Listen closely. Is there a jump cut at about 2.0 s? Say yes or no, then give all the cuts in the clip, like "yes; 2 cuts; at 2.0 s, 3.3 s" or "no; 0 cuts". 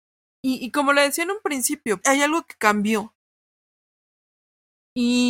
yes; 1 cut; at 2.0 s